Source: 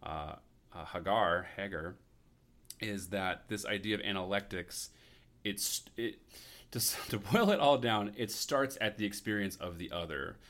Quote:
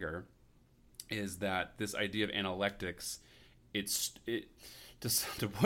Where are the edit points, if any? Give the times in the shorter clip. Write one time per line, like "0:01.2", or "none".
none